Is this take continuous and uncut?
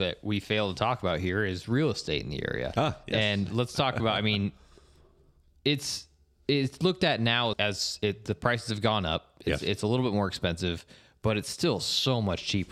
no; 1 cut; at 7.5 s

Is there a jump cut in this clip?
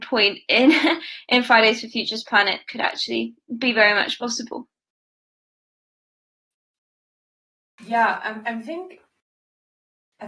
no; 0 cuts

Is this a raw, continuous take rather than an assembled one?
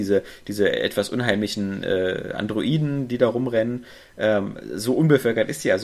yes; 0 cuts

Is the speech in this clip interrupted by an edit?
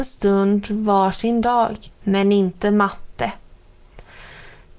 yes; 1 cut; at 1.9 s

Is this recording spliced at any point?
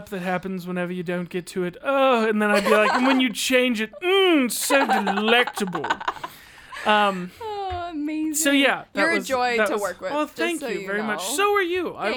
no; 0 cuts

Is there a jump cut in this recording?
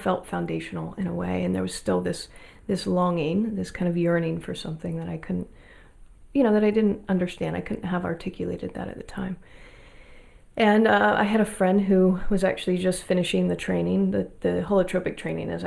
no; 0 cuts

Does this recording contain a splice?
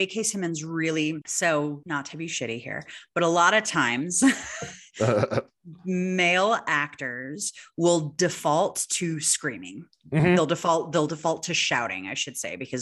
no; 0 cuts

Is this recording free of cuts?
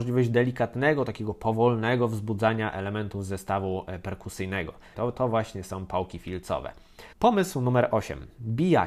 no; 2 cuts; at 4.9 s, 7.1 s

